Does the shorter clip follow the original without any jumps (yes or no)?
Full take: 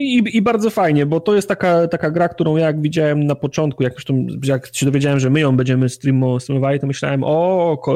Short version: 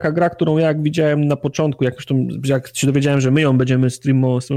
yes